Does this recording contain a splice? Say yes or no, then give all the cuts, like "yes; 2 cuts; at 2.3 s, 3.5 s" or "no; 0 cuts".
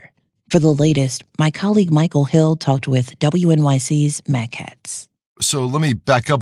yes; 1 cut; at 5.3 s